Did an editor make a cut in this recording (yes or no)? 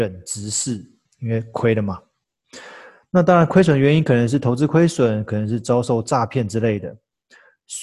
yes